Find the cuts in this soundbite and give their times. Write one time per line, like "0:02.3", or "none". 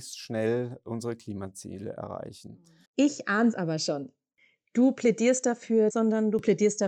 0:02.9
0:05.9